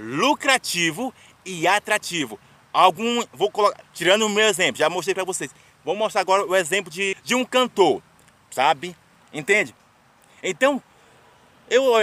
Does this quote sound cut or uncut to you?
cut